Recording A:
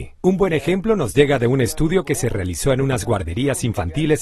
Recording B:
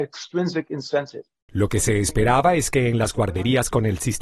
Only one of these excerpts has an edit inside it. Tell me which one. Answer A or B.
B